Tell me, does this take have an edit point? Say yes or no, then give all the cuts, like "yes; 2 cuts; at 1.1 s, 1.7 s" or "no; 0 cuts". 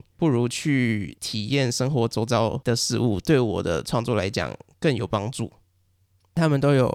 no; 0 cuts